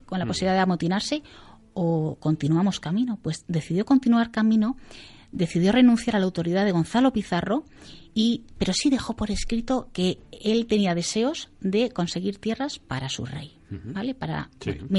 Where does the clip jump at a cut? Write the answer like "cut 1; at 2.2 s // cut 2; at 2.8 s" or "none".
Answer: none